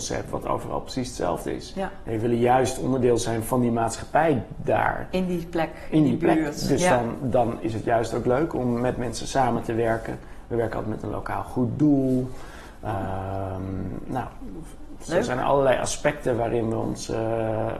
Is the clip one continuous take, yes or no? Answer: yes